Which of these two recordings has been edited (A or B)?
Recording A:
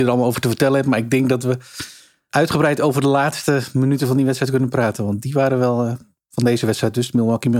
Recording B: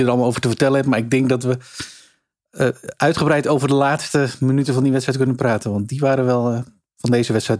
A